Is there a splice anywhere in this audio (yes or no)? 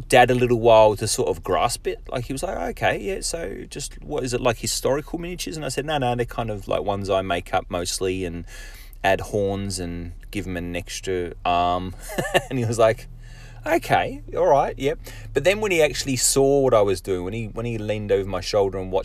no